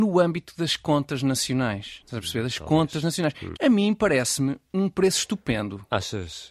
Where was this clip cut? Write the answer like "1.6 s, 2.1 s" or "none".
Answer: 3.5 s